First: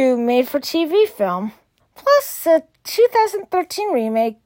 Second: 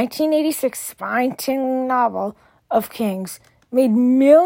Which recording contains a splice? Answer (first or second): first